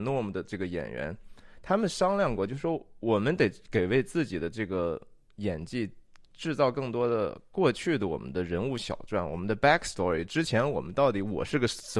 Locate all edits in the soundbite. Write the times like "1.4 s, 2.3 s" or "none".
none